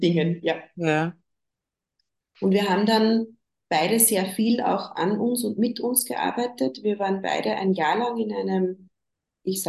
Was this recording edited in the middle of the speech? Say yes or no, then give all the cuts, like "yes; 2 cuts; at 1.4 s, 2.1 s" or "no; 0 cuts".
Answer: no; 0 cuts